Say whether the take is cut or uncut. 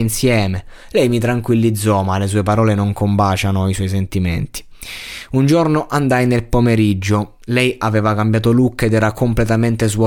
uncut